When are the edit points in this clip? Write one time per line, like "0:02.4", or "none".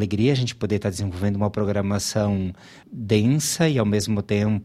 0:02.8